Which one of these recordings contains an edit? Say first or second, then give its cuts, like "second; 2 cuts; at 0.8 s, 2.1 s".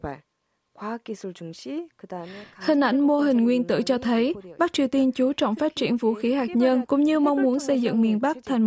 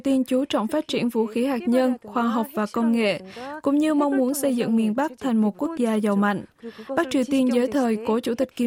first; 1 cut; at 6.9 s